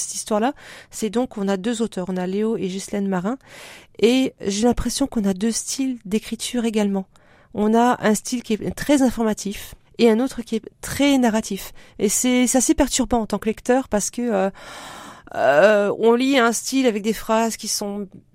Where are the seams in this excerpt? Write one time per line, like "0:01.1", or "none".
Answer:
0:09.8